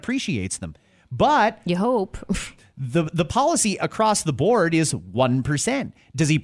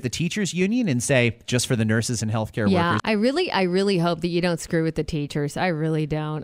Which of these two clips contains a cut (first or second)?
second